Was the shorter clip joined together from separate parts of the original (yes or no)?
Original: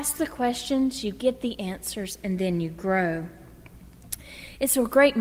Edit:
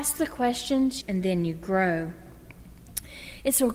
yes